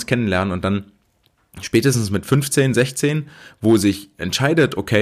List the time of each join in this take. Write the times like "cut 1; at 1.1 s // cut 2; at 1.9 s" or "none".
none